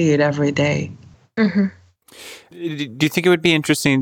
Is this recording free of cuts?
yes; 0 cuts

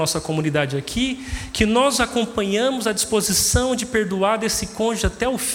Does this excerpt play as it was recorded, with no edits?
yes; 0 cuts

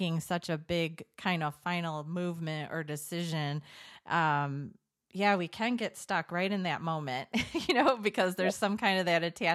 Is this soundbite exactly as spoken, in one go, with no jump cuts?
yes; 0 cuts

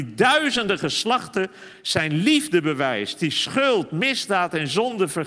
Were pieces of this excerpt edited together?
no; 0 cuts

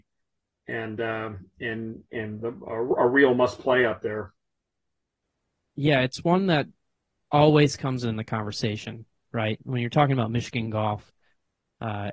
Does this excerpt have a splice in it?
no; 0 cuts

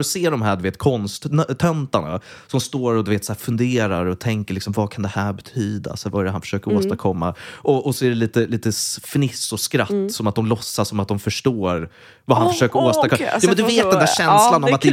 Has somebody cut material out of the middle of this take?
no; 0 cuts

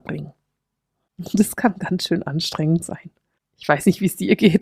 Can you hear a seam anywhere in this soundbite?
no; 0 cuts

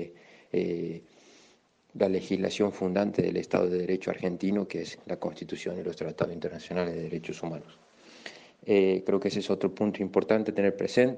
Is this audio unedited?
yes; 0 cuts

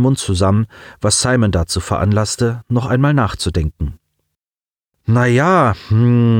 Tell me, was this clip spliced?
no; 0 cuts

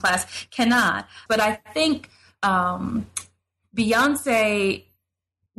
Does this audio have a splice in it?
yes; 1 cut; at 1.3 s

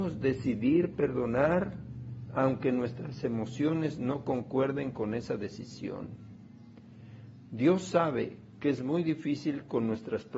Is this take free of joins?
yes; 0 cuts

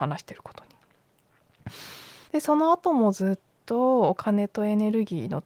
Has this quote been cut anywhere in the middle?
yes; 1 cut; at 2.3 s

